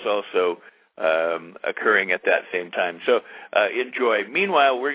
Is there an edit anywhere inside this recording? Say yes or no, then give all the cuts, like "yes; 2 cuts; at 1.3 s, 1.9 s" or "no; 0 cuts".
no; 0 cuts